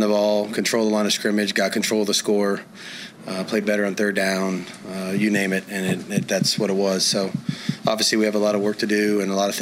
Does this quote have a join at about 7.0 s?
no; 0 cuts

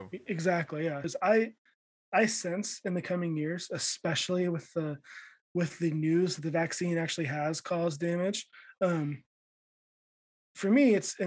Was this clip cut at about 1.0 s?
yes; 1 cut; at 1.0 s

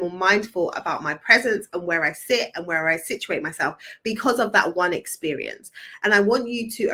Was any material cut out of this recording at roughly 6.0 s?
yes; 1 cut; at 6.0 s

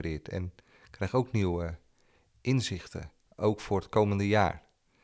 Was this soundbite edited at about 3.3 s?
yes; 1 cut; at 3.3 s

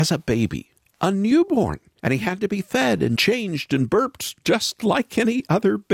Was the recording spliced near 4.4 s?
no; 1 cut; at 2.0 s

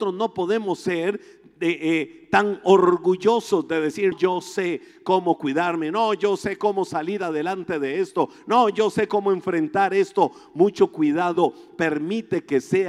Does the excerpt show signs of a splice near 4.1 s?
yes; 1 cut; at 4.1 s

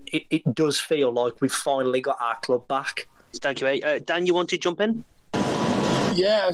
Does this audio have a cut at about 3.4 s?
no; 0 cuts

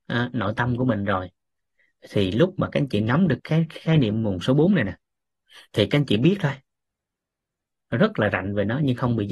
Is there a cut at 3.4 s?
yes; 1 cut; at 3.4 s

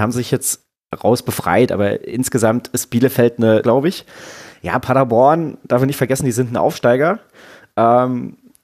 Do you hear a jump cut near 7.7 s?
no; 1 cut; at 3.6 s

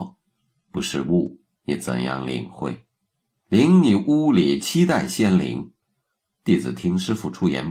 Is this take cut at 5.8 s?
yes; 3 cuts; at 1.5 s, 3.4 s, 5.8 s

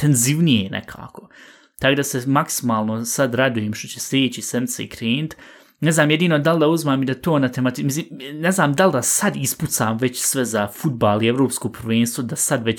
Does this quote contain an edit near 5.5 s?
no; 0 cuts

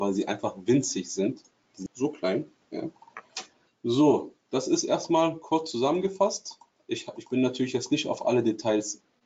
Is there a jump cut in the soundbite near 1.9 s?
yes; 2 cuts; at 1.9 s, 3.7 s

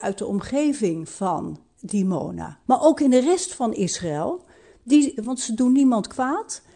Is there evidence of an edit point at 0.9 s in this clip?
no; 2 cuts; at 2.6 s, 5.2 s

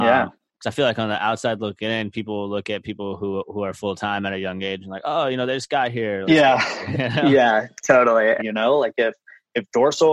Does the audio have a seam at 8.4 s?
yes; 2 cuts; at 6.2 s, 8.4 s

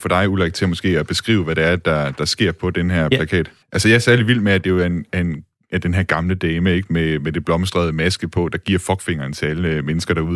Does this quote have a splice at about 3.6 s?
yes; 1 cut; at 3.6 s

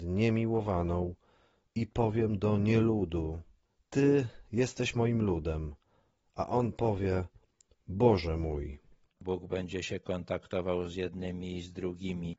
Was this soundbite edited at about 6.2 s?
no; 1 cut; at 9.2 s

